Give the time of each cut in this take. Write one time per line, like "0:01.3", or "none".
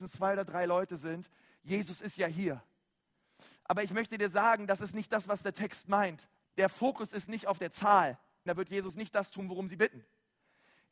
0:06.4
0:08.5